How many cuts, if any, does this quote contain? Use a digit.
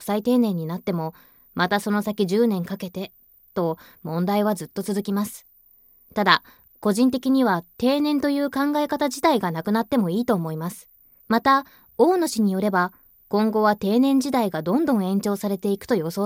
2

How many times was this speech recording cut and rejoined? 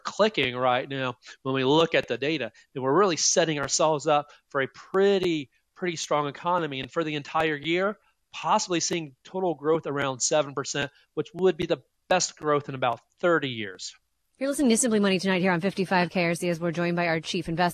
0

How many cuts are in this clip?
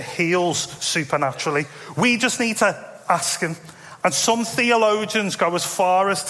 1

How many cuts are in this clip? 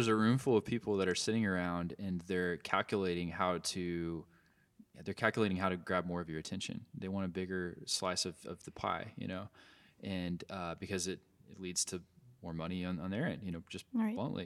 0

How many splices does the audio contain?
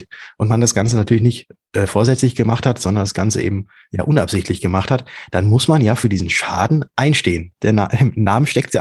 1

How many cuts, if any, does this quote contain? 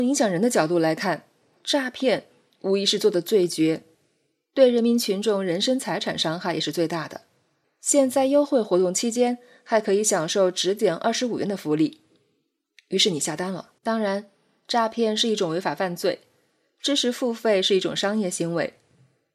2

